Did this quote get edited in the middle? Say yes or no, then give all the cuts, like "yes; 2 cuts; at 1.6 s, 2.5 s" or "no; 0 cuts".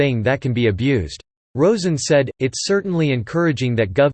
yes; 1 cut; at 1.4 s